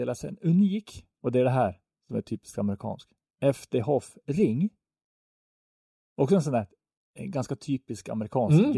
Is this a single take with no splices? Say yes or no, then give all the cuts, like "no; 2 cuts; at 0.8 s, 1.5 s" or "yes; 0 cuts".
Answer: no; 1 cut; at 6.0 s